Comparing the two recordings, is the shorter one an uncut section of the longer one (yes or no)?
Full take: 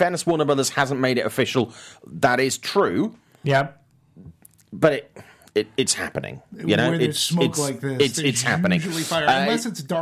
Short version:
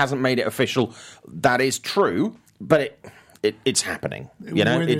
no